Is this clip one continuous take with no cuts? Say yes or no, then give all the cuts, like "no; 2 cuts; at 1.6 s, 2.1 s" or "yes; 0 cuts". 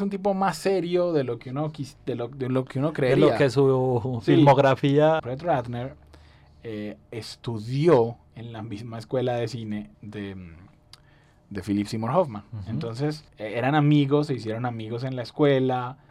no; 3 cuts; at 5.2 s, 9.9 s, 13.3 s